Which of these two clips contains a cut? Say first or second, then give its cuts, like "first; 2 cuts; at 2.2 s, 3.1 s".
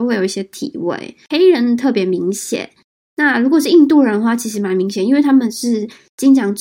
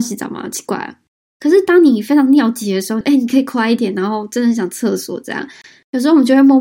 second; 2 cuts; at 1.3 s, 3.0 s